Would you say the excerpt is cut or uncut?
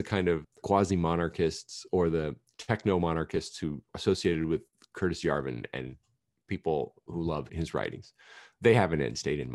uncut